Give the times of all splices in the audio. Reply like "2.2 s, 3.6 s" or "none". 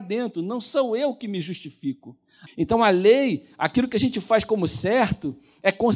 2.5 s